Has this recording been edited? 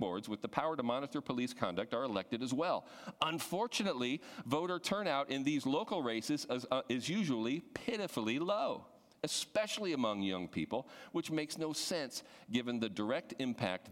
no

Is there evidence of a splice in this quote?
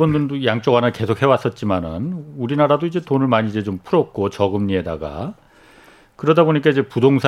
no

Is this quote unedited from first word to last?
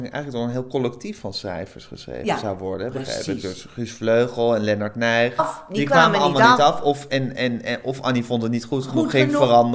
no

